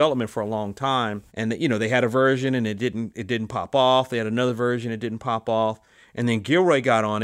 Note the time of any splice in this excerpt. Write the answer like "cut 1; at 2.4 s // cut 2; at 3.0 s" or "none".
cut 1; at 1.3 s